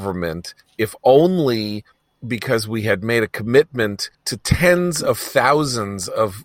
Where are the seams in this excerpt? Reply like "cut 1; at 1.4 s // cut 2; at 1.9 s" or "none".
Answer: cut 1; at 4.1 s